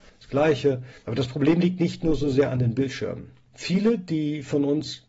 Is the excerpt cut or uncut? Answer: uncut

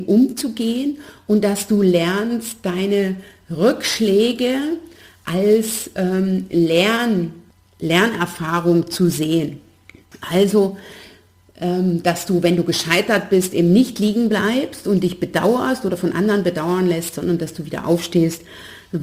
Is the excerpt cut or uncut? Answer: uncut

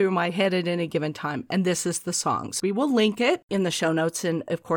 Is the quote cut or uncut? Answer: cut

